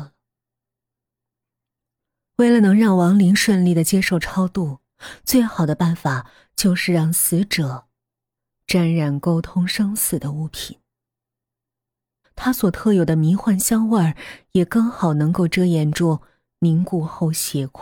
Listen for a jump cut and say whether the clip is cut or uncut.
cut